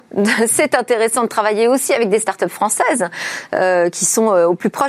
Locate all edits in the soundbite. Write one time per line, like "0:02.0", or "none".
none